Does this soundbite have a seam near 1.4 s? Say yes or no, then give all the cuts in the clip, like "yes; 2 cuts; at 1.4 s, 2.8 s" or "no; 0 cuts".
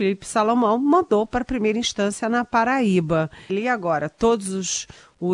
no; 1 cut; at 3.5 s